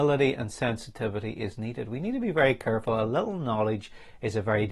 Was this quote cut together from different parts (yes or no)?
no